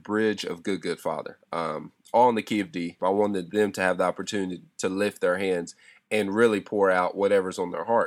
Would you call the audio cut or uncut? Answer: cut